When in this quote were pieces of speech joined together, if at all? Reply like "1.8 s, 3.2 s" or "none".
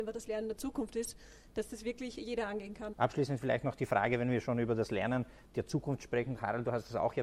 2.9 s